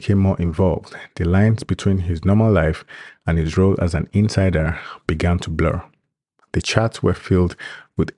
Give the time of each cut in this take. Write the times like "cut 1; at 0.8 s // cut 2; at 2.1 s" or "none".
cut 1; at 6.4 s